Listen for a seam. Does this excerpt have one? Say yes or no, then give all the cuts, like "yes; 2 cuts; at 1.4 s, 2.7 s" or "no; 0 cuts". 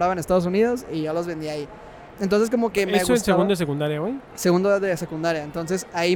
no; 0 cuts